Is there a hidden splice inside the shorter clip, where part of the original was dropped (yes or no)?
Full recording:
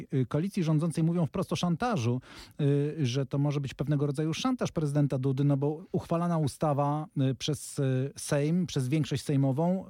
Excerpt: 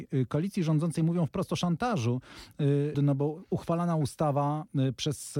yes